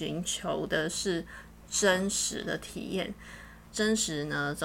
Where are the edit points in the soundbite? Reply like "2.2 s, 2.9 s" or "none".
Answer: 3.7 s